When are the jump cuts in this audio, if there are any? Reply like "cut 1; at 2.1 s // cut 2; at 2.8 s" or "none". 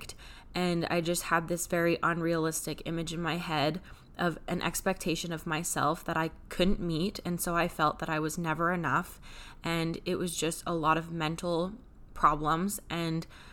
none